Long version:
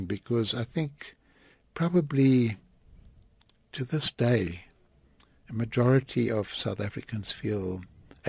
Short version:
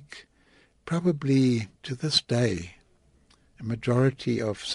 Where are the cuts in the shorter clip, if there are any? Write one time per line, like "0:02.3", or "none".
0:01.8